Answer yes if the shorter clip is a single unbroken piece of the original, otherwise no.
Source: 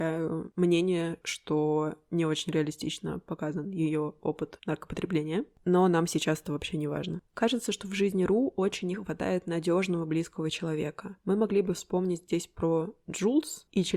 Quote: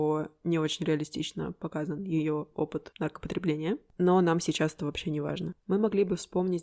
no